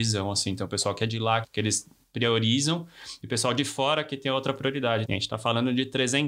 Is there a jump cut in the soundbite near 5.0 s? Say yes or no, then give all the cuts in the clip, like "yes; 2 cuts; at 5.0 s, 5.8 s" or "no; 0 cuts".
yes; 2 cuts; at 1.4 s, 5.0 s